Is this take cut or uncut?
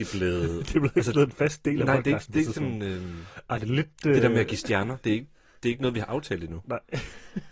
uncut